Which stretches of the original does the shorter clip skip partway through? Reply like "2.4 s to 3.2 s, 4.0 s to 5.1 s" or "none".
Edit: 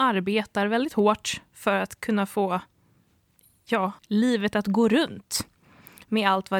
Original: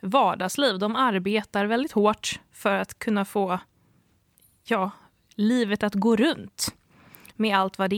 5.0 s to 5.3 s

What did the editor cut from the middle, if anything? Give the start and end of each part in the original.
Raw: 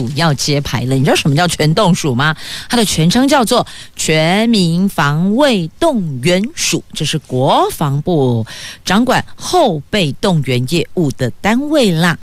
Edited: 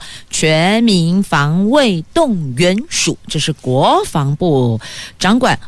none

